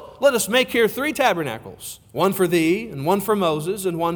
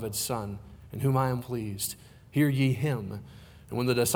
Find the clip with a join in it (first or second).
second